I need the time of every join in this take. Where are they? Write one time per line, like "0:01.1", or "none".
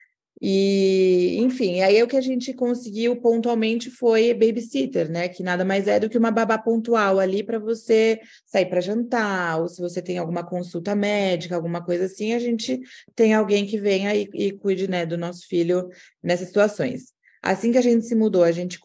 none